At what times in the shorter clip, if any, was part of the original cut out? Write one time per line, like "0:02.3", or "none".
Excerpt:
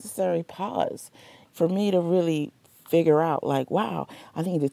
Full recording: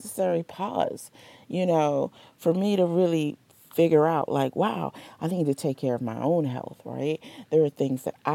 0:01.5